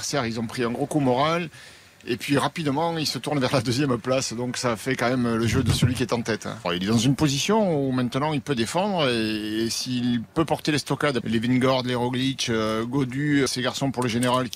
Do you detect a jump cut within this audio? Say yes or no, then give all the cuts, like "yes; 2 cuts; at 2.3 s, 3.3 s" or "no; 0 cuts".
yes; 3 cuts; at 6.6 s, 11.2 s, 13.5 s